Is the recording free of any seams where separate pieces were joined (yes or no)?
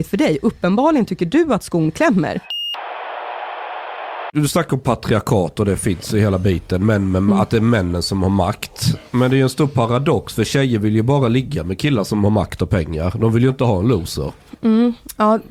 yes